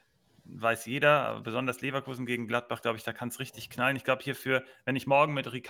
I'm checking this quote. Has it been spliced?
no; 0 cuts

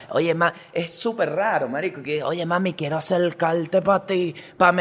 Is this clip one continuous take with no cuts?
yes; 0 cuts

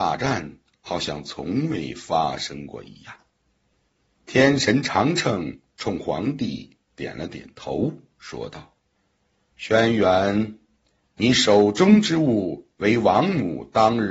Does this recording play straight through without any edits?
yes; 0 cuts

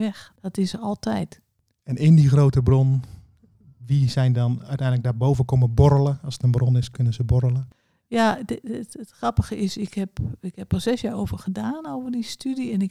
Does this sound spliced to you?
no; 0 cuts

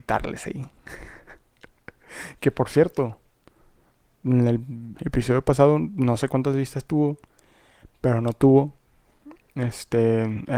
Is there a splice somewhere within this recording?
yes; 1 cut; at 4.9 s

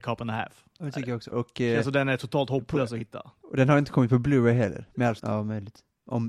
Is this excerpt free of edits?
no; 2 cuts; at 1.3 s, 5.2 s

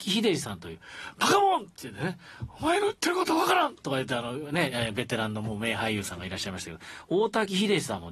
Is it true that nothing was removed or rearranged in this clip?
yes; 0 cuts

